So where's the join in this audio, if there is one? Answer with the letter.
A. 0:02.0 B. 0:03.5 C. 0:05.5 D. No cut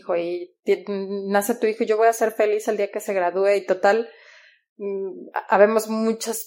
D